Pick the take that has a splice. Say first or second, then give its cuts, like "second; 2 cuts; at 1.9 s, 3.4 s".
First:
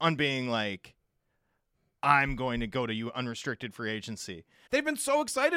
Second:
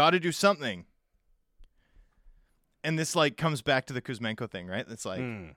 first; 1 cut; at 4.7 s